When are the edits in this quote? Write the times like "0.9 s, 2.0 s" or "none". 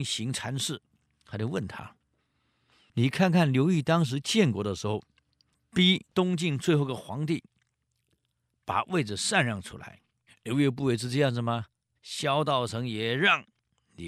6.1 s, 10.3 s, 12.0 s